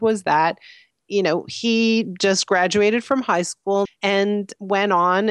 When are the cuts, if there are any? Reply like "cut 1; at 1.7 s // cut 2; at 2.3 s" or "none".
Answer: cut 1; at 3.9 s